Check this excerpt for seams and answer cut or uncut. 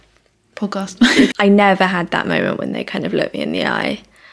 cut